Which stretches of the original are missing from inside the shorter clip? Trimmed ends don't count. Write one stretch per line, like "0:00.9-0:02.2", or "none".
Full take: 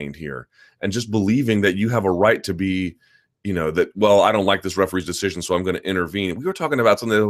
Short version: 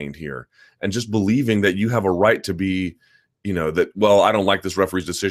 none

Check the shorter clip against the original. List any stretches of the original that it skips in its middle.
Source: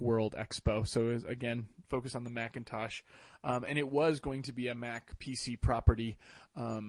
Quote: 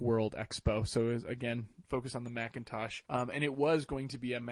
0:03.0-0:03.4

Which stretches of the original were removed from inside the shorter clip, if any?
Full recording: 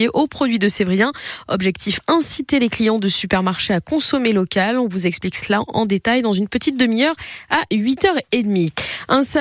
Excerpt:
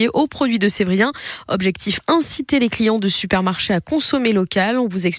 none

